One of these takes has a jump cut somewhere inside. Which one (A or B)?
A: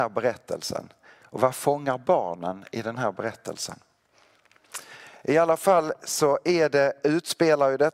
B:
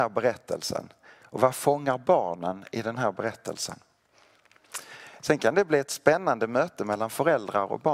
B